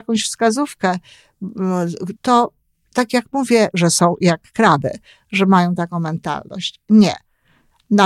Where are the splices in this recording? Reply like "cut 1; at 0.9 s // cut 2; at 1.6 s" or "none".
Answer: cut 1; at 2.1 s // cut 2; at 3.7 s